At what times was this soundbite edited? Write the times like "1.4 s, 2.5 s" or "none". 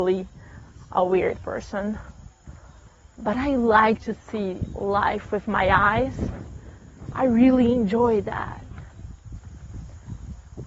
none